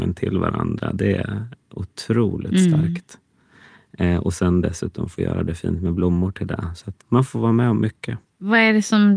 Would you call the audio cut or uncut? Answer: cut